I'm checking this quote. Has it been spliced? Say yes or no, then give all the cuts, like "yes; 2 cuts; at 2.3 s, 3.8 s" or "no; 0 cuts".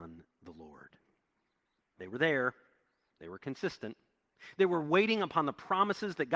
yes; 1 cut; at 1.8 s